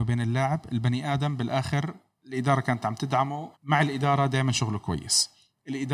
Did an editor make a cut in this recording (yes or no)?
yes